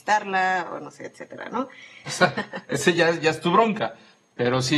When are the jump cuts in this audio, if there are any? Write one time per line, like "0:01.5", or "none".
0:02.1